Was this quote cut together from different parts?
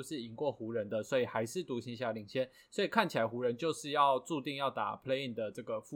no; 0 cuts

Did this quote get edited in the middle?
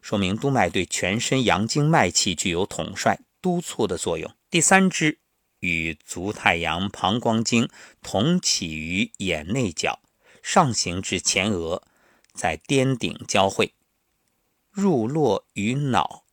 yes; 1 cut; at 4.5 s

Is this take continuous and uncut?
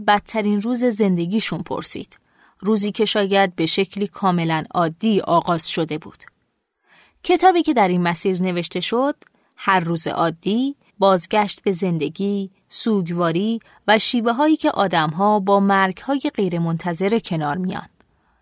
no; 2 cuts; at 10.9 s, 12.6 s

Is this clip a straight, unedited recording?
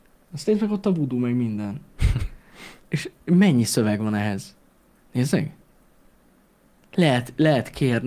no; 1 cut; at 5.0 s

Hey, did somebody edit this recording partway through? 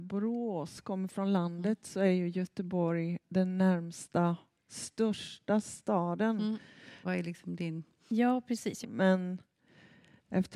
yes; 3 cuts; at 3.2 s, 7.0 s, 8.8 s

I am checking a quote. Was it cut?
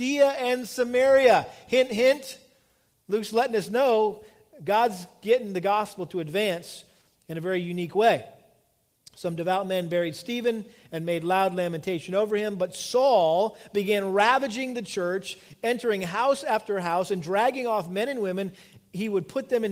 no; 0 cuts

